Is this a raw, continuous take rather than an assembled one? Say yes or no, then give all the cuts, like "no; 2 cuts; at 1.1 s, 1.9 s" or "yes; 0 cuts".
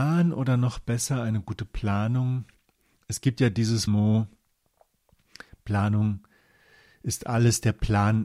no; 1 cut; at 3.9 s